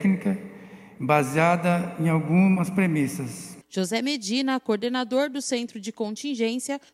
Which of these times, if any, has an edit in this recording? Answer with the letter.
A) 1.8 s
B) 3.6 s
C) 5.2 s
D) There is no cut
B